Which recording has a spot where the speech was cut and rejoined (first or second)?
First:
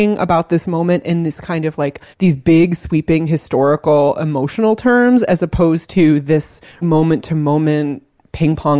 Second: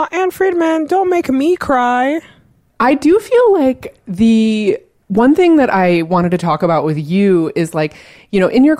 first